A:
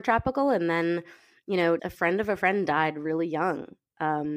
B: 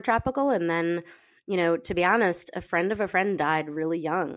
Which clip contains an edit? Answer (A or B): A